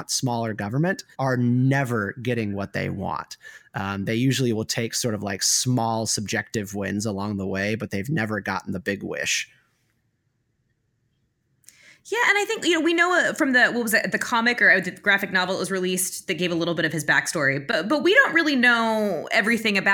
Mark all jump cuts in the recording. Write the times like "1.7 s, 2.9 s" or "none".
1.1 s